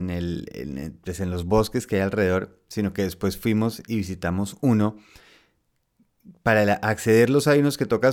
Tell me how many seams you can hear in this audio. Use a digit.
0